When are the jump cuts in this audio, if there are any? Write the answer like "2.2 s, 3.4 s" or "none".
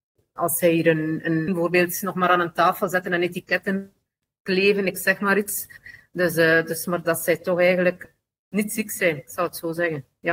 1.5 s